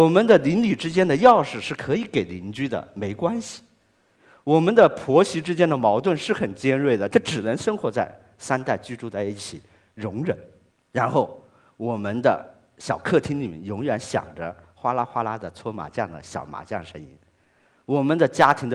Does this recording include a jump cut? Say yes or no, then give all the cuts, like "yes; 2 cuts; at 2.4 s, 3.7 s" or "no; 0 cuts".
yes; 1 cut; at 7.1 s